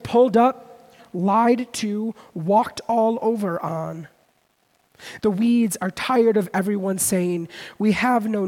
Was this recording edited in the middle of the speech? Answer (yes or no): yes